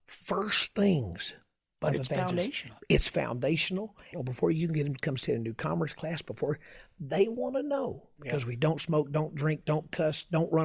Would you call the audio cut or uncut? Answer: cut